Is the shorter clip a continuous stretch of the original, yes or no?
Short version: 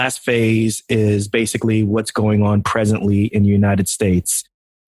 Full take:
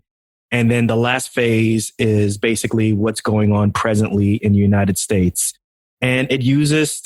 yes